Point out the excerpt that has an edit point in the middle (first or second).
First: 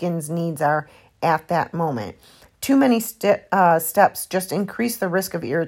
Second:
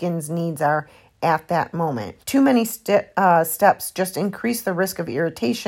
second